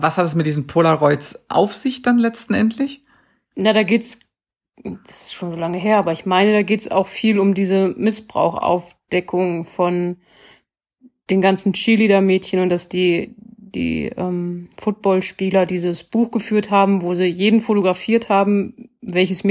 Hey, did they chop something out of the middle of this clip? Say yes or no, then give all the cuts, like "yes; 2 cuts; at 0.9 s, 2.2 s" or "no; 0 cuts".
no; 0 cuts